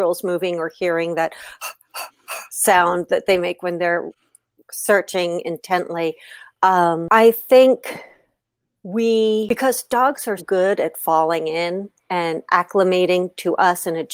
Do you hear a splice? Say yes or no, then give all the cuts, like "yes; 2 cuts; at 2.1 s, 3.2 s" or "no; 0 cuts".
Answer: yes; 2 cuts; at 10.4 s, 12.1 s